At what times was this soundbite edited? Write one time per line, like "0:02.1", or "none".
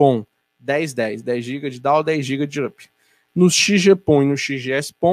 0:03.3